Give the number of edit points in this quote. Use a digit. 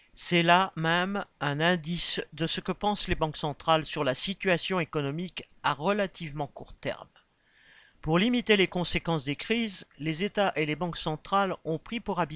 0